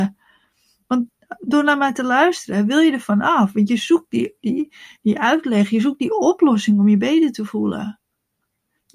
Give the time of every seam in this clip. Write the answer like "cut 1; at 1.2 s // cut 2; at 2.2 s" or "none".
none